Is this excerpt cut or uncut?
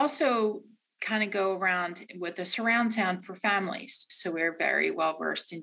cut